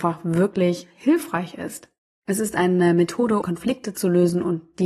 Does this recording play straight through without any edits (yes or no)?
no